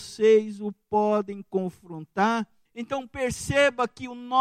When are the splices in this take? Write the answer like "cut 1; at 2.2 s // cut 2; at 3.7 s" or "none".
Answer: cut 1; at 2.7 s